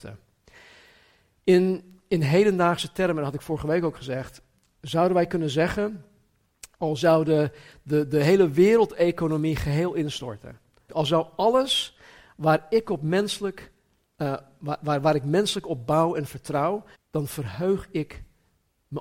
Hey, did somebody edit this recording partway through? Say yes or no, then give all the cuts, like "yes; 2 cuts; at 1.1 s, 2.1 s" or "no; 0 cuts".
yes; 2 cuts; at 10.9 s, 16.9 s